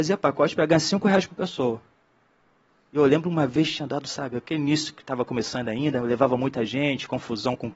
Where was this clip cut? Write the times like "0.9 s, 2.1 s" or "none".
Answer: none